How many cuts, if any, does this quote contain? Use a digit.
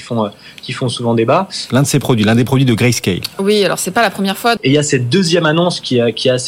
2